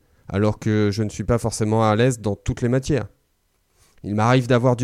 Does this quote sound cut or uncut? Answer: uncut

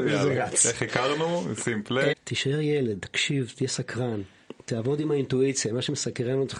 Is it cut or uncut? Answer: cut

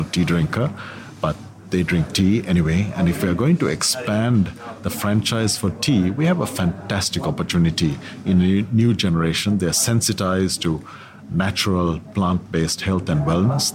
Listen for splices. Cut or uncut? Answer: uncut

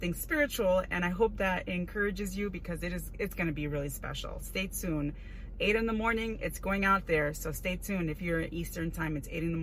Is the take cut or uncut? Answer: uncut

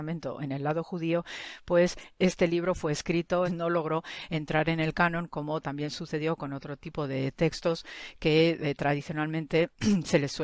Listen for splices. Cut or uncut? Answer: cut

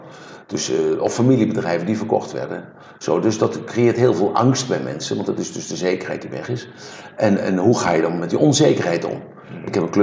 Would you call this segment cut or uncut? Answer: uncut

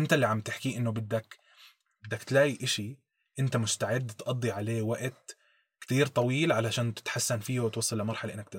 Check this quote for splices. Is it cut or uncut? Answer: uncut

